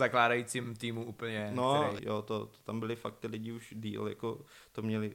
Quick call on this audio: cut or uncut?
cut